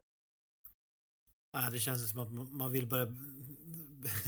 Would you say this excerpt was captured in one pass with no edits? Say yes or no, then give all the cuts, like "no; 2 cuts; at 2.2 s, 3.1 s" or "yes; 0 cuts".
yes; 0 cuts